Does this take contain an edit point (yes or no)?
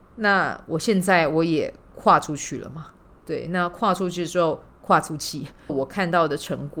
yes